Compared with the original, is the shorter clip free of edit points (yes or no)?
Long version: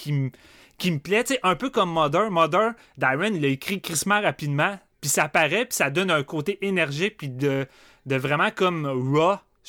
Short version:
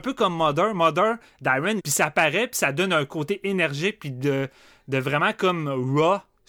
no